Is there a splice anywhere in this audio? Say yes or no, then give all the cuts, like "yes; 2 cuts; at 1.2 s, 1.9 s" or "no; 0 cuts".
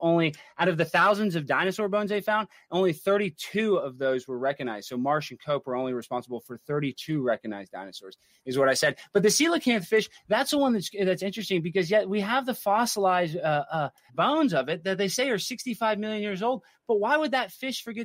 yes; 1 cut; at 14.1 s